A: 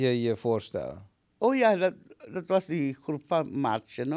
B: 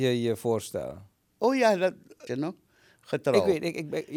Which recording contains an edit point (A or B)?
B